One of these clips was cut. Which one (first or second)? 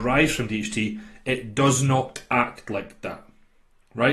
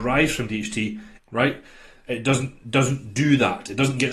second